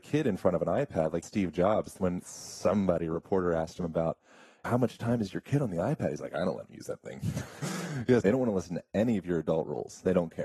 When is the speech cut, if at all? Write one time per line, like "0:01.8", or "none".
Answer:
0:01.2
0:08.2